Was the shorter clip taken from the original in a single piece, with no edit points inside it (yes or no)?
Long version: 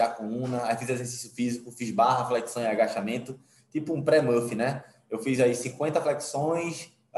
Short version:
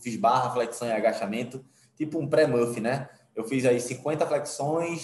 yes